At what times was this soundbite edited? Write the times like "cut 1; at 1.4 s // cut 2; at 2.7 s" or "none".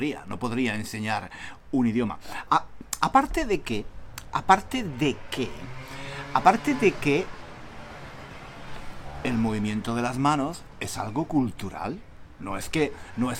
none